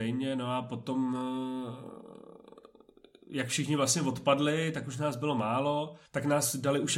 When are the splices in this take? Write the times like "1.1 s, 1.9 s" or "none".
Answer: 6.1 s